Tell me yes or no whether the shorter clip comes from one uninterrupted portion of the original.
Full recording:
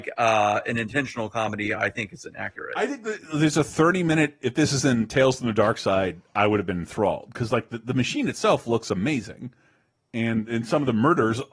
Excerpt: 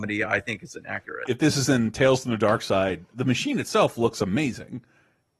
no